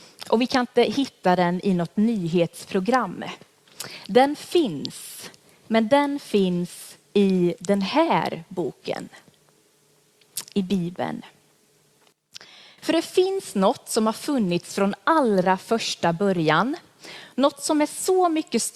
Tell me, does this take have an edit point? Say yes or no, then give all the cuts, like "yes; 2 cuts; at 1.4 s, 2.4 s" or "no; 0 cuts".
no; 0 cuts